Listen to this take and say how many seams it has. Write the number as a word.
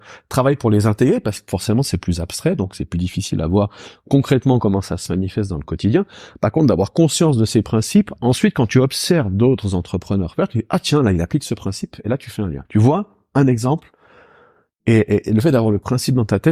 one